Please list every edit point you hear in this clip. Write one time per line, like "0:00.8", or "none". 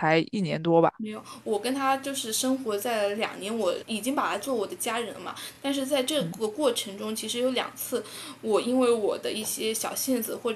none